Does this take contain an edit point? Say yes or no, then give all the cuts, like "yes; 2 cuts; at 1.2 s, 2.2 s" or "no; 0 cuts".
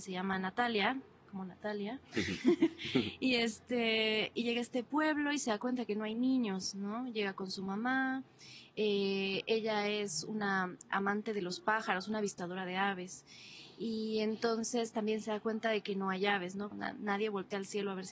yes; 1 cut; at 16.7 s